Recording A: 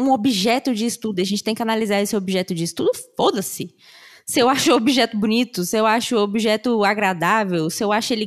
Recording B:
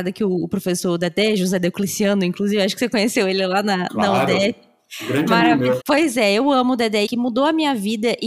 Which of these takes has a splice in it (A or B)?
B